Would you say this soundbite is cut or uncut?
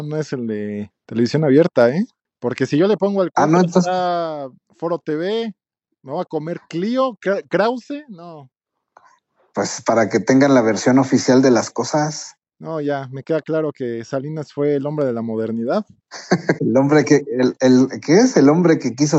cut